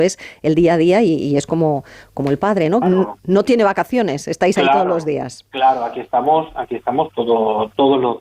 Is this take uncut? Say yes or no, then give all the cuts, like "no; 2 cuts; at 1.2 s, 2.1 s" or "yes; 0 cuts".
no; 1 cut; at 2.8 s